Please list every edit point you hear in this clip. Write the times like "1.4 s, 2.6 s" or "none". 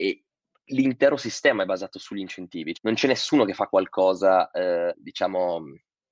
2.7 s, 4.9 s